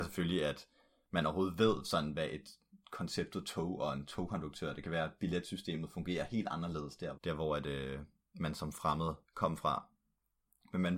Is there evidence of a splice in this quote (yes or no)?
yes